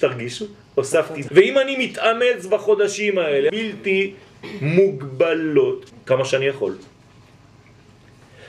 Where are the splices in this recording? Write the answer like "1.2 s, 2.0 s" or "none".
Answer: 1.3 s, 3.5 s, 5.9 s